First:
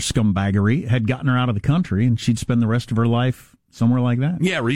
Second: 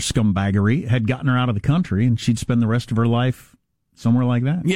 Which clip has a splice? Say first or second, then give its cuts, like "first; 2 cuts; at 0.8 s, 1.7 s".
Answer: first; 1 cut; at 3.6 s